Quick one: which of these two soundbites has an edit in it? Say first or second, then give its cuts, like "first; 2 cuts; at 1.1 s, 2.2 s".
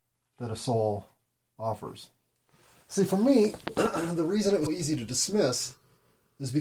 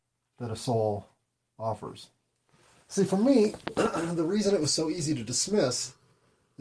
first; 1 cut; at 4.7 s